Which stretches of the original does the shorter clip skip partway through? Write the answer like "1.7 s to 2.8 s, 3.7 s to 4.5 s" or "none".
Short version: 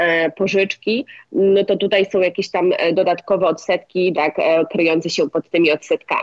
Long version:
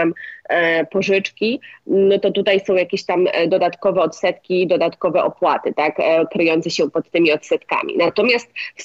4.7 s to 5.7 s